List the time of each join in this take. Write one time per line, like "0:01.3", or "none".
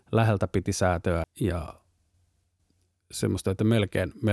0:01.2